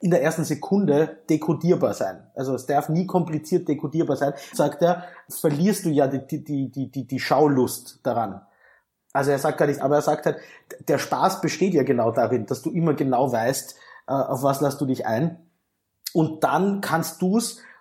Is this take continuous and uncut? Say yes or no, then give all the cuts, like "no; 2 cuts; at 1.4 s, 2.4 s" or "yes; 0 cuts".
no; 2 cuts; at 4.5 s, 9.8 s